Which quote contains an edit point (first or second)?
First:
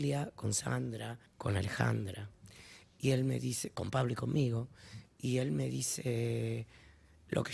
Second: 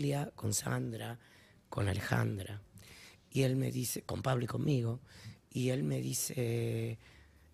first